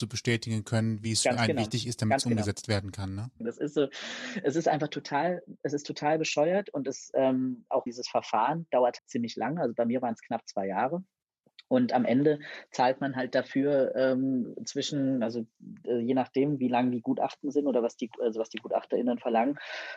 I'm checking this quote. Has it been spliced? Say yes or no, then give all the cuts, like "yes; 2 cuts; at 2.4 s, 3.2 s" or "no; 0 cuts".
yes; 3 cuts; at 3.4 s, 7.9 s, 9.0 s